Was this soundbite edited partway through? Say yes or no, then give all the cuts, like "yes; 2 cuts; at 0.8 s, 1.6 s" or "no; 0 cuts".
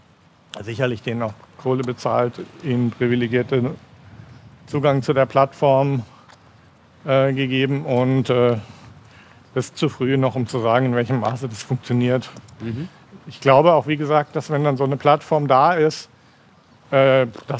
no; 0 cuts